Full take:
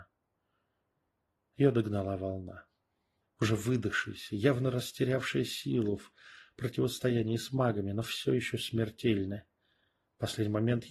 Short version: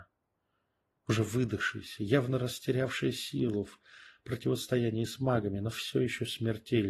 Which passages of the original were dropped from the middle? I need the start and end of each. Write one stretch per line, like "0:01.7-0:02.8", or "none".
0:01.0-0:03.3